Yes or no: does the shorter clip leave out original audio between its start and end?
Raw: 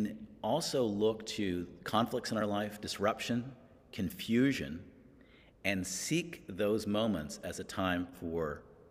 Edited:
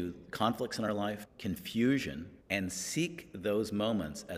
yes